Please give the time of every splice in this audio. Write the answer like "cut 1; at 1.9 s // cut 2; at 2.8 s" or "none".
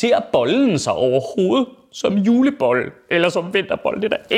none

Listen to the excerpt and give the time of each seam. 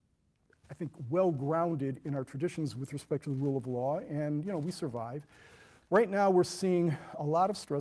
none

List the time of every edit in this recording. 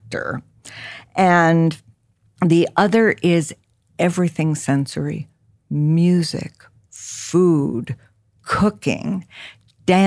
none

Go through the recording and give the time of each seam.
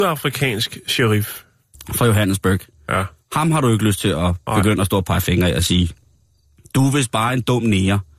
none

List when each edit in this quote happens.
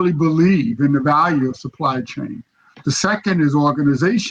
cut 1; at 2.7 s

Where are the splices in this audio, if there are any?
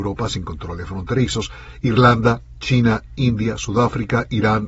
none

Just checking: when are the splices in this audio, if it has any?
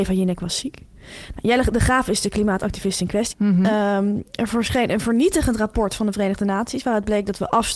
cut 1; at 3.3 s

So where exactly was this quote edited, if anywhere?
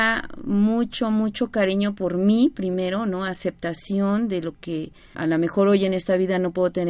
cut 1; at 5.1 s

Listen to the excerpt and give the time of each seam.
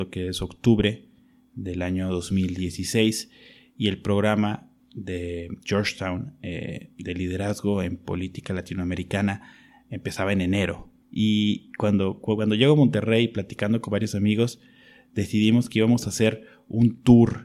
cut 1; at 11.0 s

